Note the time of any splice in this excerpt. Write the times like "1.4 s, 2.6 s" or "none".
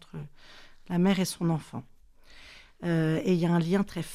2.7 s